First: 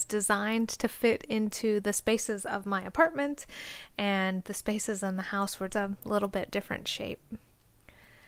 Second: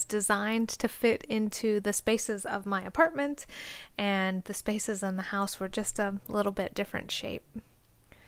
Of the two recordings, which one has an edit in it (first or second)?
first